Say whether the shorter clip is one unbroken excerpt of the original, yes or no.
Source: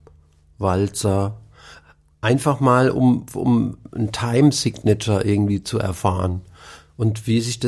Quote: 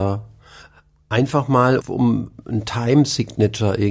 no